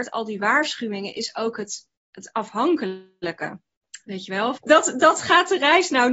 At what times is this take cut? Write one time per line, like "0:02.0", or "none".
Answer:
0:04.6

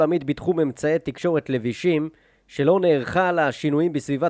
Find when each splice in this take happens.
none

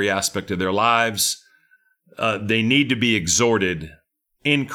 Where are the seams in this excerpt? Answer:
none

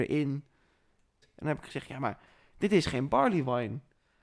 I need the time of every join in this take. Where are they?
0:01.2

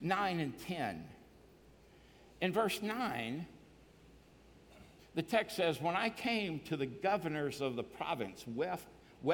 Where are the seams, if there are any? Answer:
none

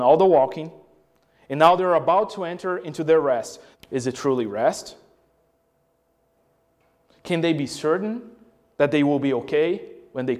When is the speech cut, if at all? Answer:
0:03.7

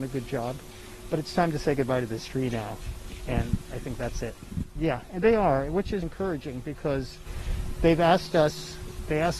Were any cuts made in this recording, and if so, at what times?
0:04.8
0:06.0

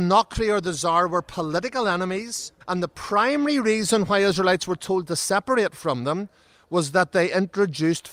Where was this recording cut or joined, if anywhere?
0:02.6

